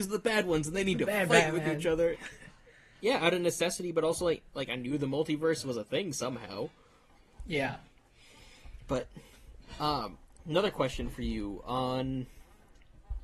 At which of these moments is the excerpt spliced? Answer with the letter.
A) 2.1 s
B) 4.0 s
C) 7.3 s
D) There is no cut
A